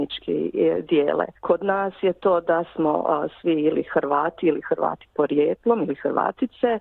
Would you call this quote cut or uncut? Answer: cut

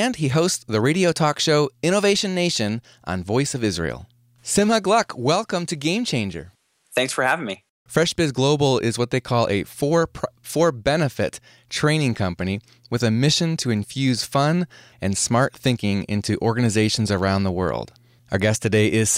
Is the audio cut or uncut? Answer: cut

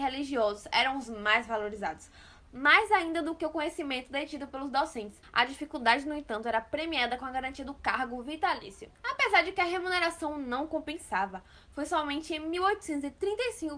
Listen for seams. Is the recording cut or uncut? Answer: cut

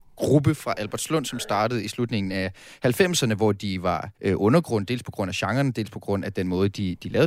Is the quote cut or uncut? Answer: cut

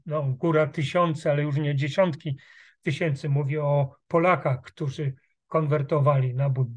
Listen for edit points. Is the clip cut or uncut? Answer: uncut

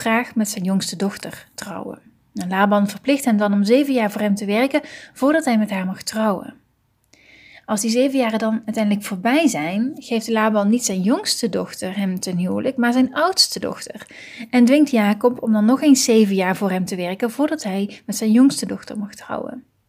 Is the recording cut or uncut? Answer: uncut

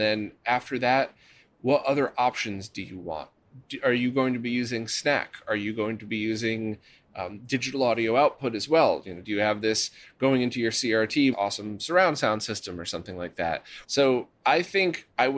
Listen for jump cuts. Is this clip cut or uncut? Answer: cut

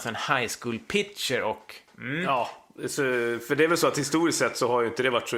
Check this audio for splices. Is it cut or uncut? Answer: uncut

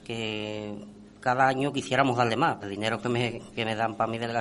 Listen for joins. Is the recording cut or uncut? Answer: cut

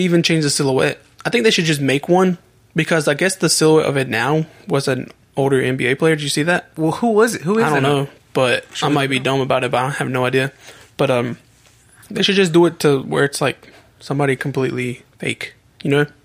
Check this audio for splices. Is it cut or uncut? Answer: uncut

